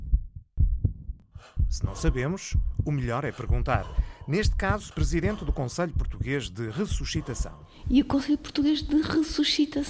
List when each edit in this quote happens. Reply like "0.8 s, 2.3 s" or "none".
4.9 s